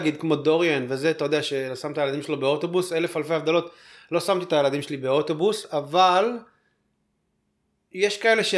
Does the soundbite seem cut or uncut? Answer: uncut